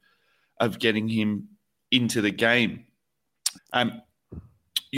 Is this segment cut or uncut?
cut